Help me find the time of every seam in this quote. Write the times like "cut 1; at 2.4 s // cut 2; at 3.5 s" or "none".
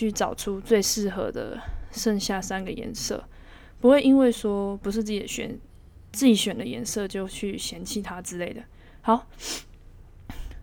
none